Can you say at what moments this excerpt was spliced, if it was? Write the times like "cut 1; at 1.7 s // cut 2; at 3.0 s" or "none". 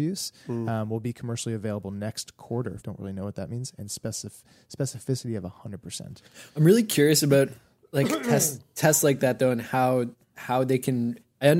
cut 1; at 2.8 s